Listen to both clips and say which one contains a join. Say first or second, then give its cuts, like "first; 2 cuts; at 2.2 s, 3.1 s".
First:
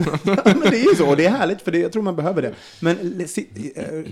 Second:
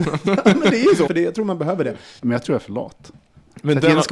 second; 2 cuts; at 1.1 s, 2.2 s